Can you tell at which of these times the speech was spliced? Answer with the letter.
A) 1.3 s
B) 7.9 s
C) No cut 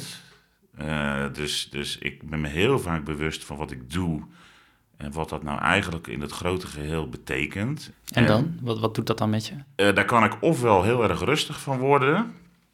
B